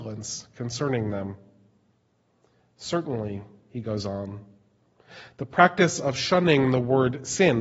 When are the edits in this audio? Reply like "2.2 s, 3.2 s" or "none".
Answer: none